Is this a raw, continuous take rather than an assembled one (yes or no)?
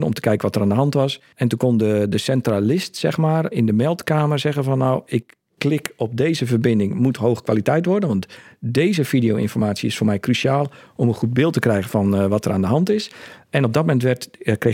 no